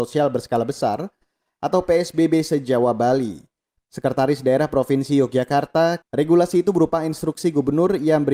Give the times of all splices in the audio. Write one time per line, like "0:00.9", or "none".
0:03.8
0:06.0